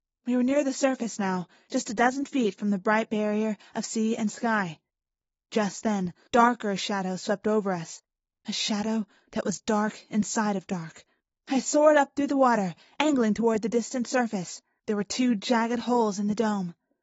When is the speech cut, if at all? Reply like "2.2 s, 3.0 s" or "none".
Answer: 6.3 s, 11.3 s, 14.8 s